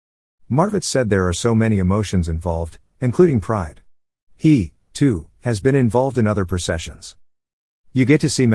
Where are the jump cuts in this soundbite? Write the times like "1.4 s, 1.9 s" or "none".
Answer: none

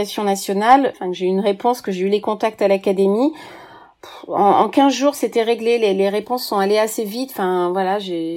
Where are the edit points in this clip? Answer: 0.9 s

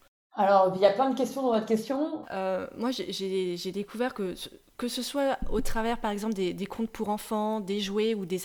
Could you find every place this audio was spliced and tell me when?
2.2 s

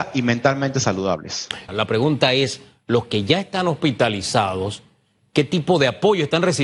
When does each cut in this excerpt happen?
1.7 s

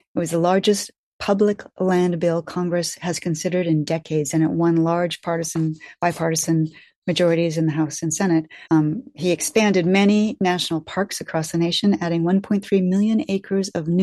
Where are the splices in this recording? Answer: 8.6 s

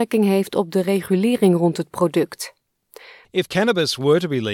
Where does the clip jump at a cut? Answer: 3.2 s

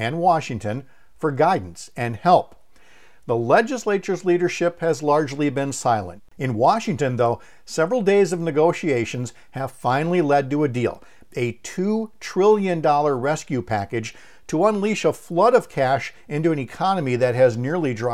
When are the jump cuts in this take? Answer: 6.2 s

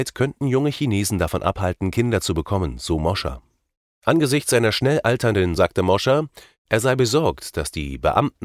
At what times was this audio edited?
3.9 s, 5.6 s

